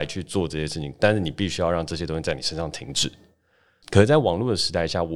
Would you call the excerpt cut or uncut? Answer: cut